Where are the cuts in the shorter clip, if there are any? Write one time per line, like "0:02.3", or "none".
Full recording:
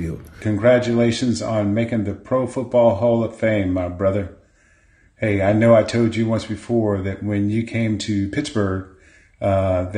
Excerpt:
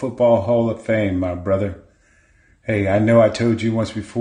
none